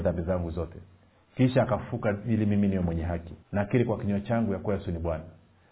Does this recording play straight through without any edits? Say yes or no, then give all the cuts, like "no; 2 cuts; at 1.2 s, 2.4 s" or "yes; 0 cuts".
no; 1 cut; at 3.4 s